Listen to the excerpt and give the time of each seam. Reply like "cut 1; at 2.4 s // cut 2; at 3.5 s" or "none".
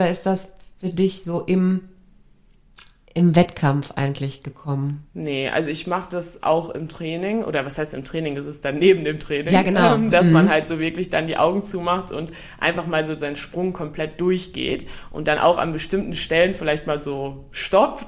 none